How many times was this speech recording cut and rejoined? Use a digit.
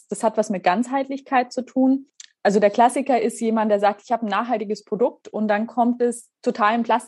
0